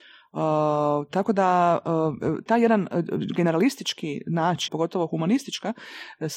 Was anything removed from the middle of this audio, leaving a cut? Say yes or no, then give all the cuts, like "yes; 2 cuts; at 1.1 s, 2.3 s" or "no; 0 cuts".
yes; 2 cuts; at 2.5 s, 4.7 s